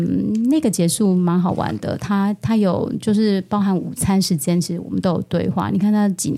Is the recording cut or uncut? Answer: uncut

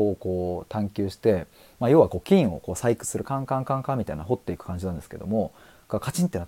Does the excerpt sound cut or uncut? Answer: uncut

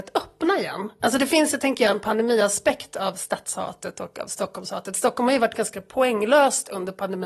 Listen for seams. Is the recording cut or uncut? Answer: uncut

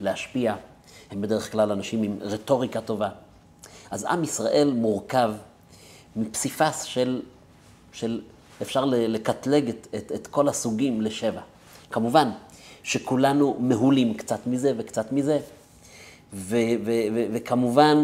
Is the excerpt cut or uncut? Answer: uncut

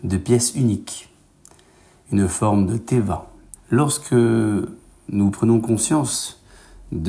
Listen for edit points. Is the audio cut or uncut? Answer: cut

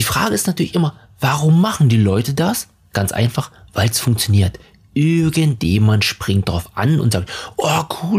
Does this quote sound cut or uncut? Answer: uncut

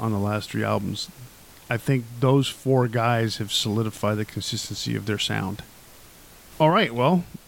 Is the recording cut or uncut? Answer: uncut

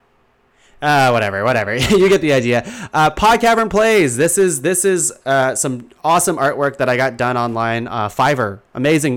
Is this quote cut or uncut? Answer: uncut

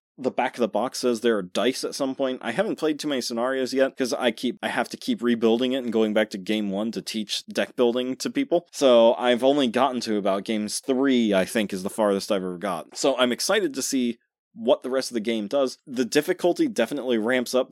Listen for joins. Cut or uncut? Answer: cut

